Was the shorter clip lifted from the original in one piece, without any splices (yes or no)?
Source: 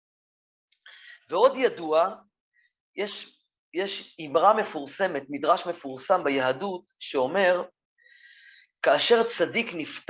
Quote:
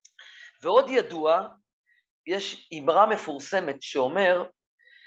no